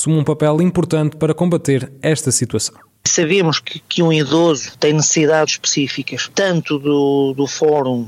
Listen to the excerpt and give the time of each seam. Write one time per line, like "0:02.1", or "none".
0:03.0
0:05.5